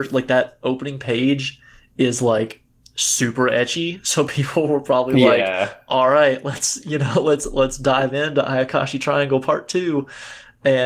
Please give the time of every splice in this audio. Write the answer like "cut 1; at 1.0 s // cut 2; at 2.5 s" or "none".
none